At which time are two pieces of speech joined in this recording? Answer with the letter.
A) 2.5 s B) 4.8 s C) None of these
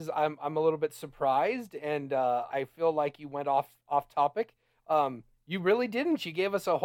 A